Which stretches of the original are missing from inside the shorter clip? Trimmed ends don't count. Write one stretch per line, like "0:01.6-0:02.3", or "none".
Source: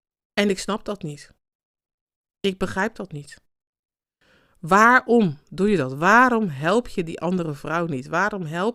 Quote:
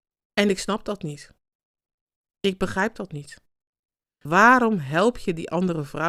0:04.3-0:06.0